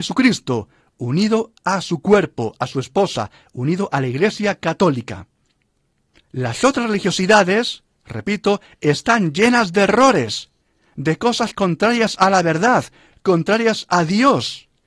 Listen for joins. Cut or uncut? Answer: uncut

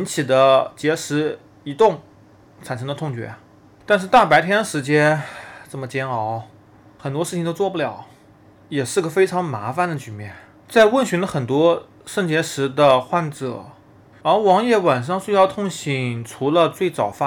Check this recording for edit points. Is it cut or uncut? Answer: cut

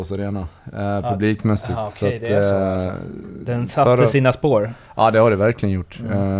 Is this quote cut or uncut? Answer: uncut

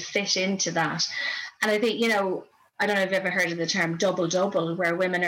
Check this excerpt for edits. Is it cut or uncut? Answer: uncut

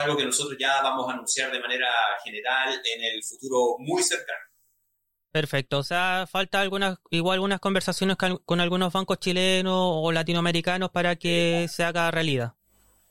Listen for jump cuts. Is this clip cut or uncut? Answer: uncut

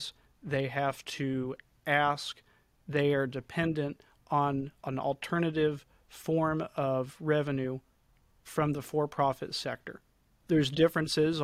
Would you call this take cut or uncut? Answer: cut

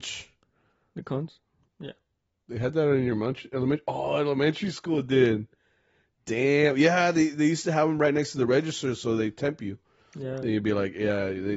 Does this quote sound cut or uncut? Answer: cut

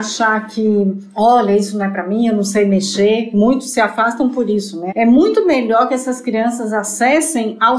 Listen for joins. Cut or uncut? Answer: cut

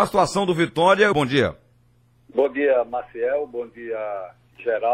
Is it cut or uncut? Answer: cut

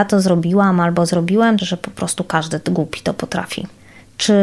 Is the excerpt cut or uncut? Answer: cut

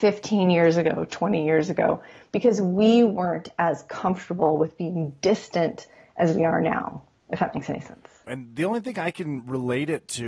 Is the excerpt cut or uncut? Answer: cut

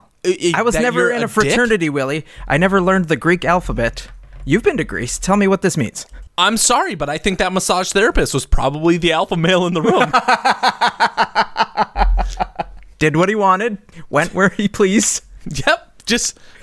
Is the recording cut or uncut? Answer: uncut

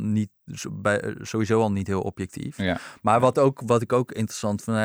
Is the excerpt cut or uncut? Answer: uncut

